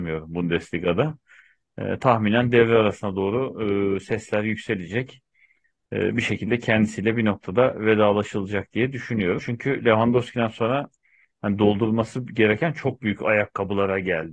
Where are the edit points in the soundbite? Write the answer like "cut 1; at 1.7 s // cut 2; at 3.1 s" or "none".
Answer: cut 1; at 9.4 s